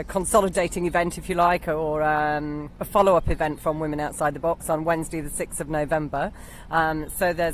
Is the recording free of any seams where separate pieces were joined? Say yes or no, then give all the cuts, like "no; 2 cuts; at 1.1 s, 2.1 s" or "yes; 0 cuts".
yes; 0 cuts